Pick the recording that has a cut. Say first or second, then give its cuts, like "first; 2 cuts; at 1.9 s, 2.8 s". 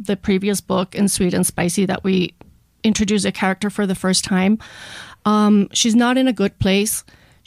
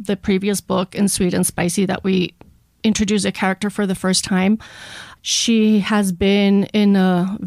second; 1 cut; at 5.2 s